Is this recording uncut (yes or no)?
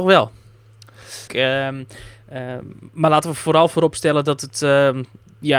no